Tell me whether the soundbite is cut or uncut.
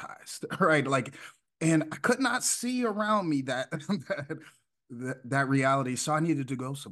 uncut